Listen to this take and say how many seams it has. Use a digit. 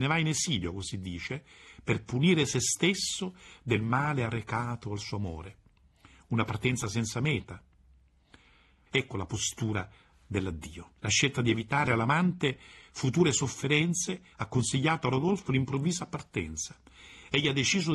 2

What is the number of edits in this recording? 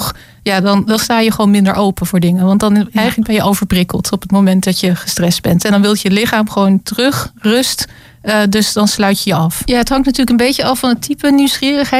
1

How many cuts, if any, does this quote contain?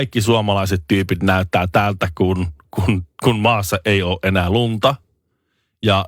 0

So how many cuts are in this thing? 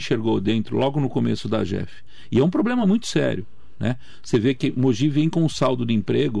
0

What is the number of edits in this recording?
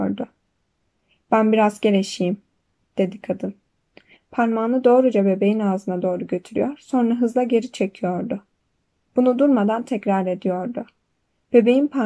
1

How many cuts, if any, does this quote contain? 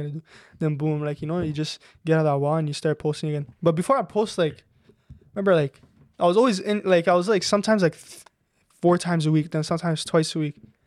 0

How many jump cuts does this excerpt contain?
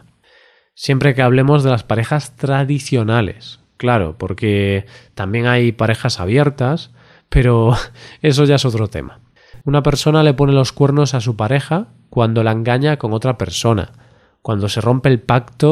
1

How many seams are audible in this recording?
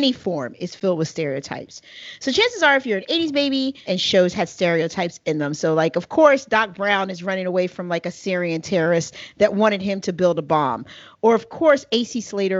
1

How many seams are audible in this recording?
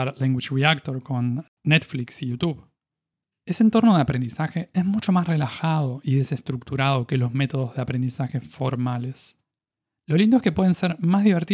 0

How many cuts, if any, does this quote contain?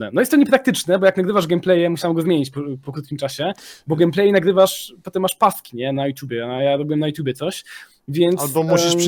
0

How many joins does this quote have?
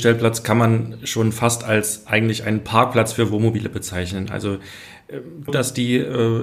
1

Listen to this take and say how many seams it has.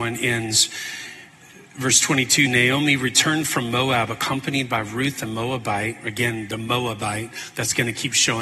1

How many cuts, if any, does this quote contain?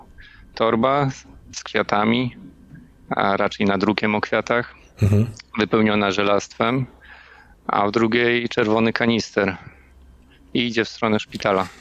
0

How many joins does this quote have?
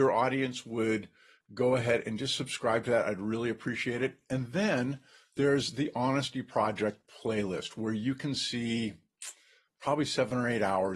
0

